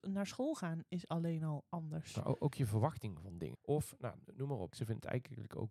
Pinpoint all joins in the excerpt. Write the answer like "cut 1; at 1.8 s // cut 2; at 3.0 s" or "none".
cut 1; at 3.5 s // cut 2; at 4.7 s